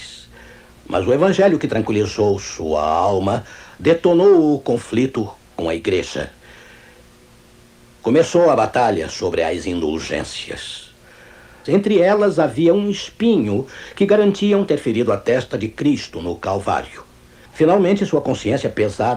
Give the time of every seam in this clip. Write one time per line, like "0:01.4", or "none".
0:11.7
0:17.5